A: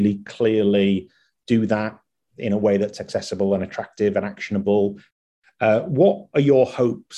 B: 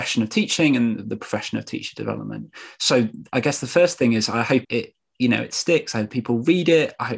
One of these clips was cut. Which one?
B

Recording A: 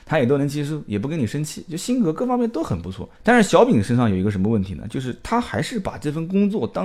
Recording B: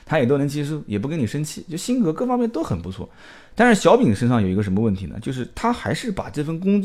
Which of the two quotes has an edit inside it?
A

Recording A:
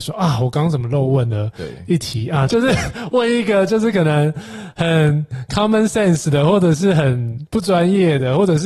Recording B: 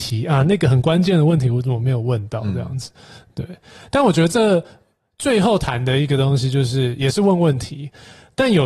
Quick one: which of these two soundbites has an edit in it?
A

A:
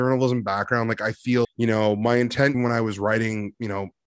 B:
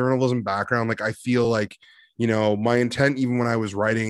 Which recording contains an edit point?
A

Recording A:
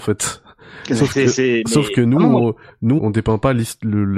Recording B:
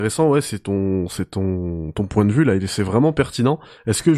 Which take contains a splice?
A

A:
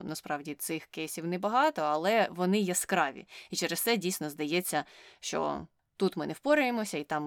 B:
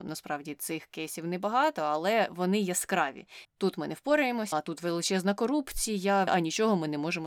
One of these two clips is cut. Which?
B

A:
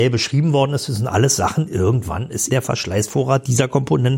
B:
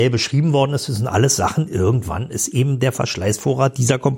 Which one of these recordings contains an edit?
A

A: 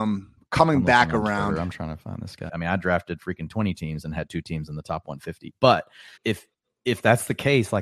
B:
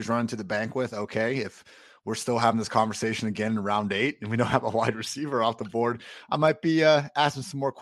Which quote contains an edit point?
A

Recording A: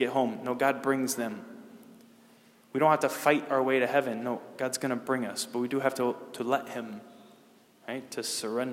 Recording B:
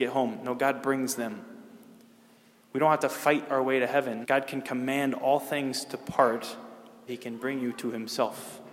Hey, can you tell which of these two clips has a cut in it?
B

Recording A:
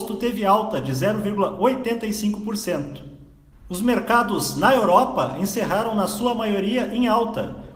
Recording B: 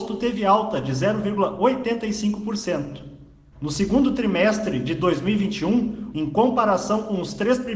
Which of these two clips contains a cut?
B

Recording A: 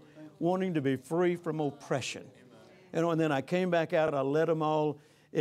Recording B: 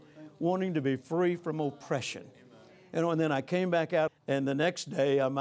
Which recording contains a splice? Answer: B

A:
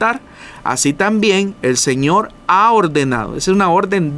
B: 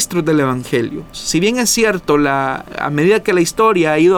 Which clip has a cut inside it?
B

